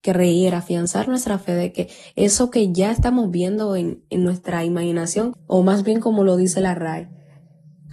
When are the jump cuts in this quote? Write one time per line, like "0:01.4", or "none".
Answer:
0:05.3